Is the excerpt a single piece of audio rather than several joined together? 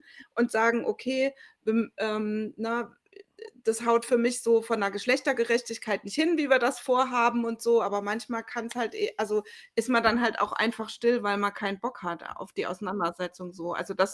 yes; 0 cuts

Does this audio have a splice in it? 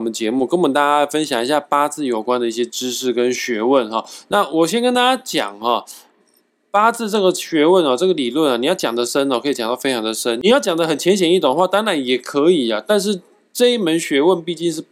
no; 0 cuts

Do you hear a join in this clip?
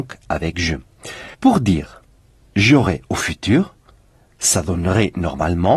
yes; 1 cut; at 1.3 s

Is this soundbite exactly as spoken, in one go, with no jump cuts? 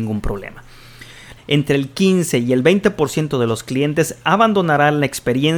no; 1 cut; at 1.4 s

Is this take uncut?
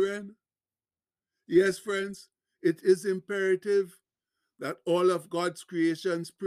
yes; 0 cuts

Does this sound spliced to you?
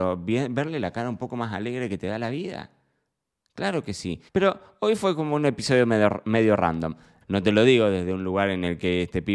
yes; 2 cuts; at 4.3 s, 7.2 s

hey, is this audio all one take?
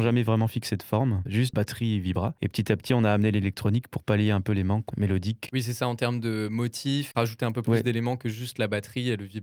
yes; 0 cuts

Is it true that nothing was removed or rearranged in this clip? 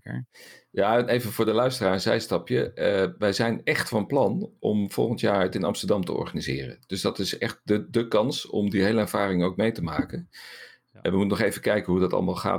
yes; 0 cuts

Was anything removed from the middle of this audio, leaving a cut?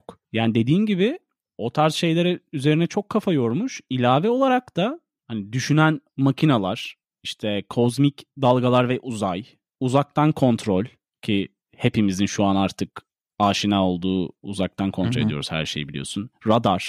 no; 0 cuts

